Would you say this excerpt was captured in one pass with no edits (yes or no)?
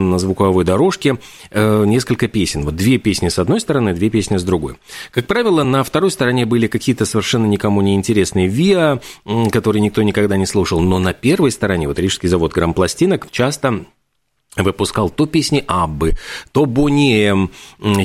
yes